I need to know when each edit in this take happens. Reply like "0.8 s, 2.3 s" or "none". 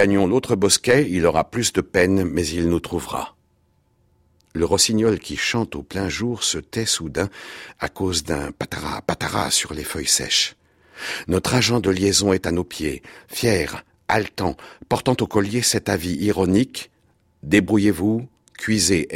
8.5 s